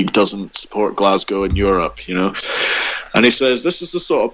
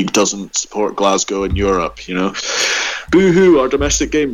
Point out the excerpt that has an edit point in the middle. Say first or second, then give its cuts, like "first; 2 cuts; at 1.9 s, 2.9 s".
second; 1 cut; at 3.1 s